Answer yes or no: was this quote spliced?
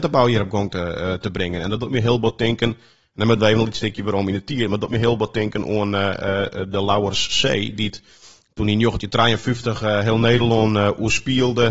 no